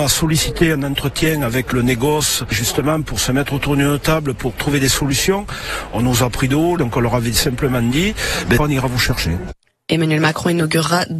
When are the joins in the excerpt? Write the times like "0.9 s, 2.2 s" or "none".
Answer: 6.8 s, 8.6 s